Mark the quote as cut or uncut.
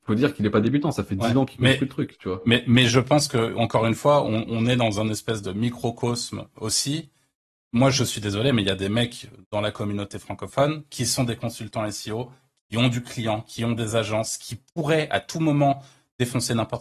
uncut